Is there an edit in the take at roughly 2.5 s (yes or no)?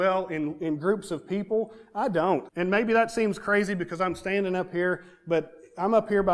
yes